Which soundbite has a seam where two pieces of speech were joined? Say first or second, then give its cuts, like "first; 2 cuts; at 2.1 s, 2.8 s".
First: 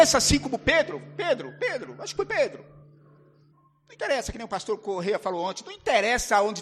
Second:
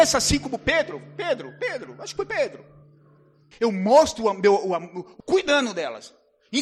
second; 2 cuts; at 3.5 s, 5.2 s